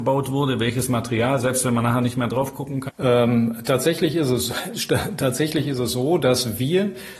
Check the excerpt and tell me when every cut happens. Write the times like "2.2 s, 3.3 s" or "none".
2.9 s